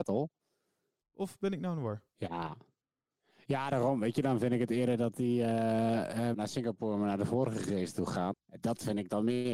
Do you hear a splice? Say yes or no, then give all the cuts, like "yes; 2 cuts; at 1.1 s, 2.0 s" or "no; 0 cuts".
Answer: yes; 3 cuts; at 1.0 s, 6.3 s, 8.3 s